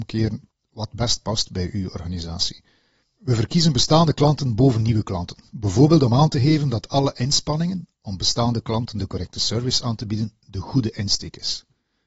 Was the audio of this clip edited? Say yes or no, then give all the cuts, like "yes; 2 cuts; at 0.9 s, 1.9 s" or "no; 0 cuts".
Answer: no; 0 cuts